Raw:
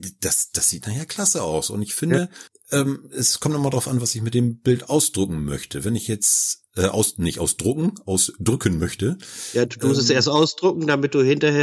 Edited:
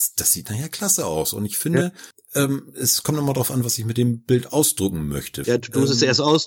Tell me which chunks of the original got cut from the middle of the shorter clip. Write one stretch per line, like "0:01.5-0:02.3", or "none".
0:05.8-0:09.5